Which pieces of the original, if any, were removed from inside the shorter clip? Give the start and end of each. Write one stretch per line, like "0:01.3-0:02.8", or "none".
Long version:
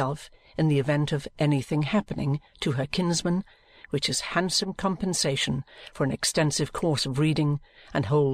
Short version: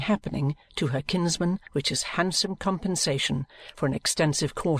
0:03.5-0:03.8